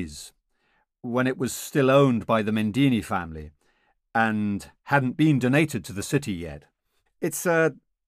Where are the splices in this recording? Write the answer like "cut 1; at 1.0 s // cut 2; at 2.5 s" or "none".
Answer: cut 1; at 7.1 s

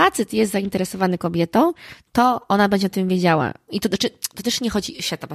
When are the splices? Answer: cut 1; at 3.7 s

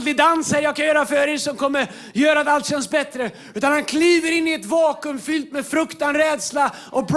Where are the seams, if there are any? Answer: none

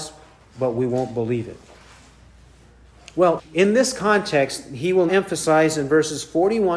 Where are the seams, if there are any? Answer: cut 1; at 3.4 s // cut 2; at 5.1 s

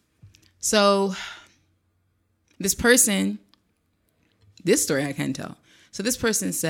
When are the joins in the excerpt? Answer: none

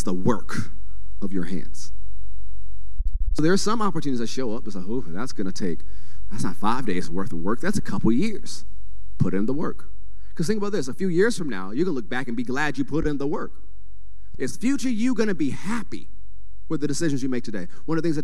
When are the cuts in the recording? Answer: cut 1; at 14.3 s

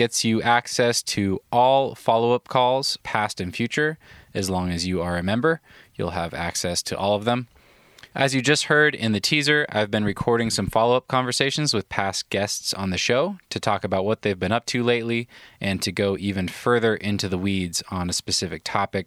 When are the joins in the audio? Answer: none

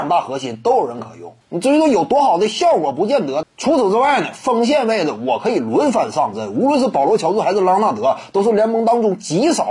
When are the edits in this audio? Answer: cut 1; at 1.4 s // cut 2; at 3.4 s

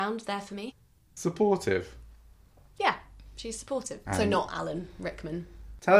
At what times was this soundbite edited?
cut 1; at 4.1 s

